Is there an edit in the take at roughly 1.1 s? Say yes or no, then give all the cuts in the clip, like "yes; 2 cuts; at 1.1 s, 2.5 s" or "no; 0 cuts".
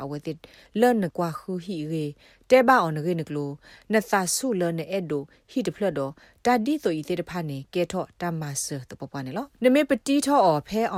yes; 2 cuts; at 1.1 s, 9.5 s